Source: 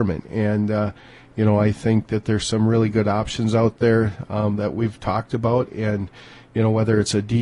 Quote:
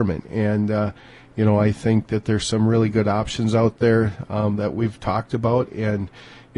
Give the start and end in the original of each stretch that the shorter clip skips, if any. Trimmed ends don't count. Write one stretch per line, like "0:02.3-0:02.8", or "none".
none

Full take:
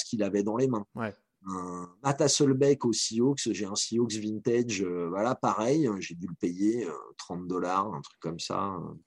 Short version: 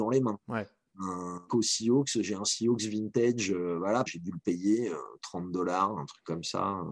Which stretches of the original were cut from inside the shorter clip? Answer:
0:01.9-0:02.8
0:05.4-0:06.0

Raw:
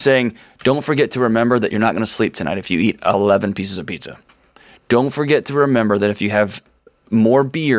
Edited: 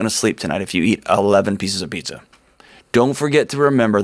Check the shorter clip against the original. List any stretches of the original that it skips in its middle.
none

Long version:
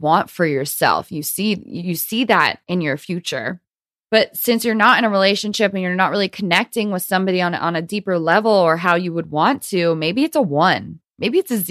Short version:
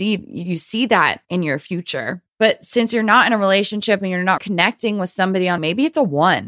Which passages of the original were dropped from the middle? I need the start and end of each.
0:03.7-0:04.0
0:06.1-0:06.3
0:07.5-0:10.0

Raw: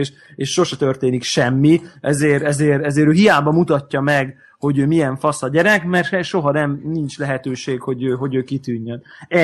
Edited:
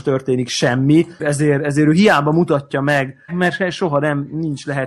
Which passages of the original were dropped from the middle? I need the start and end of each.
0:01.9-0:02.4
0:04.5-0:05.8

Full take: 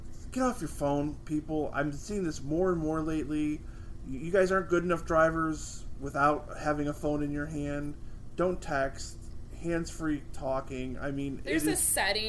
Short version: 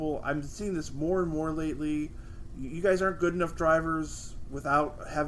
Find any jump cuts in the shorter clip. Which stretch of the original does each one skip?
none

